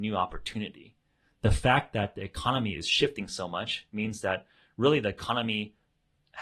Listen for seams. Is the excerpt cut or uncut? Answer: uncut